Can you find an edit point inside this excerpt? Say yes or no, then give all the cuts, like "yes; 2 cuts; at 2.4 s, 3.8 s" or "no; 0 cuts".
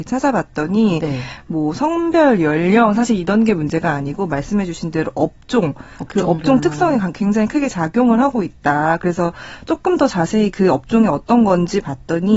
no; 0 cuts